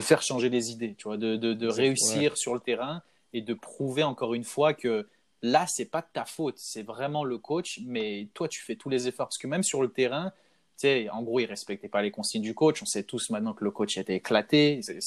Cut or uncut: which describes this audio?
uncut